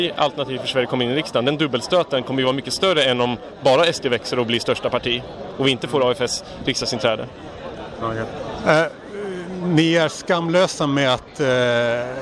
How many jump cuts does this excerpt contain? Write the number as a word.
zero